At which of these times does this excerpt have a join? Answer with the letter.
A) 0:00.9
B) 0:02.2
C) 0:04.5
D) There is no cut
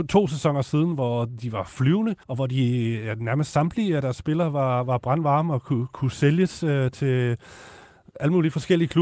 B